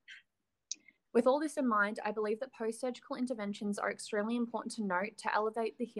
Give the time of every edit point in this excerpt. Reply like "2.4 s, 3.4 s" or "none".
1.1 s